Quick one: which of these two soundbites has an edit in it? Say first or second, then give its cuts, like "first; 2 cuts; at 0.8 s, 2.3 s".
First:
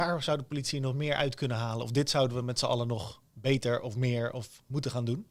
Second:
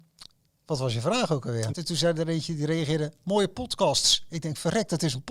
second; 1 cut; at 1.7 s